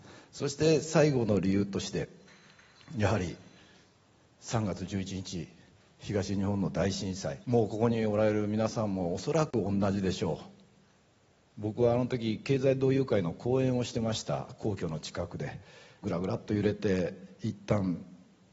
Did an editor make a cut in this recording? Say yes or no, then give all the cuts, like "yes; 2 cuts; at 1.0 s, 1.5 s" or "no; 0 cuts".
yes; 2 cuts; at 7.4 s, 16.0 s